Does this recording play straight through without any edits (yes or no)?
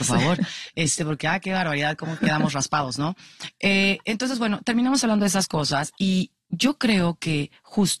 yes